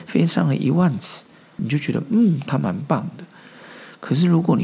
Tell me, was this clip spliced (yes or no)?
yes